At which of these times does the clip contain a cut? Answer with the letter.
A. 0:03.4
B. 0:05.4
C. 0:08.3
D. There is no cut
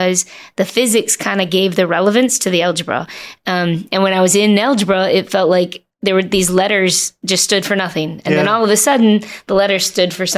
D